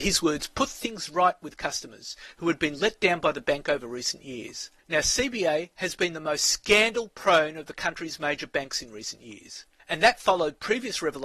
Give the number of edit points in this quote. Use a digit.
2